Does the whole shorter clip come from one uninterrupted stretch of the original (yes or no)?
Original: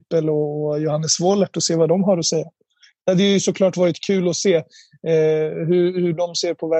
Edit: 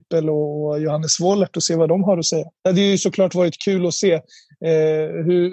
no